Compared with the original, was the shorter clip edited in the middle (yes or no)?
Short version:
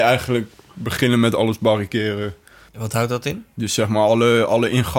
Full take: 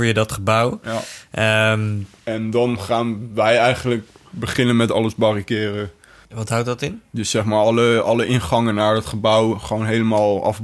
no